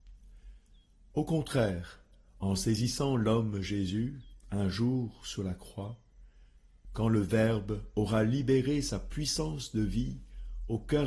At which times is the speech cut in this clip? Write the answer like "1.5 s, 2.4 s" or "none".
6.8 s